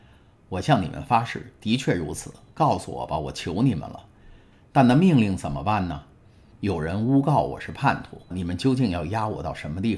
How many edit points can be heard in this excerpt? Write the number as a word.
two